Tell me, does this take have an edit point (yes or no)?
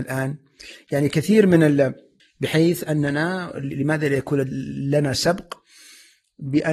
yes